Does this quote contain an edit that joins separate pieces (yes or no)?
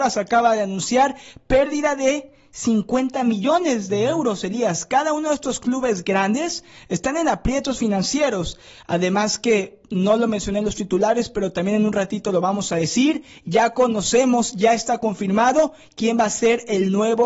no